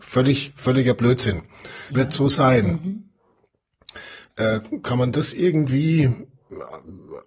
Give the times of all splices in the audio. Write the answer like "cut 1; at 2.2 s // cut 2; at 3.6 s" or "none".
cut 1; at 1.9 s